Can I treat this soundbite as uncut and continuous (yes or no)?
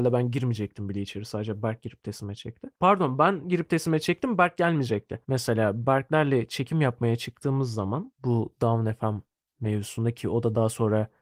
no